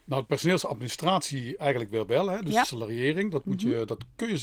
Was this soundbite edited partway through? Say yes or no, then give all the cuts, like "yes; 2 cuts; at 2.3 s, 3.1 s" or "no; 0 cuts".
no; 0 cuts